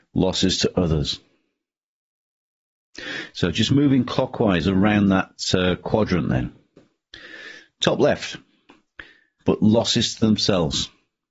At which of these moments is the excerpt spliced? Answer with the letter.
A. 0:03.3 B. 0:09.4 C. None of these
B